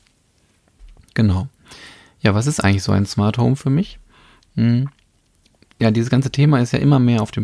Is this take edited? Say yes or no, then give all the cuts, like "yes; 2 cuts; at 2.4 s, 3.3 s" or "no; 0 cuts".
no; 0 cuts